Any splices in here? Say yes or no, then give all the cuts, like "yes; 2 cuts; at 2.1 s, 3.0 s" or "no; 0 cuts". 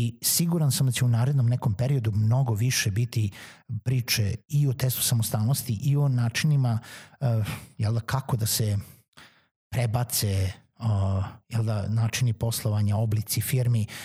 no; 0 cuts